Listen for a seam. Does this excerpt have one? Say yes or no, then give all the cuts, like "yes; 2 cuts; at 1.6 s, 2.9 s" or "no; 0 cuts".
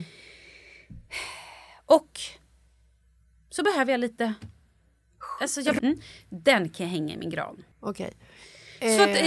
yes; 2 cuts; at 5.8 s, 7.7 s